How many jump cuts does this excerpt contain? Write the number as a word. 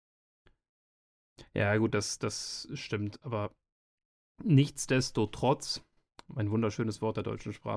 zero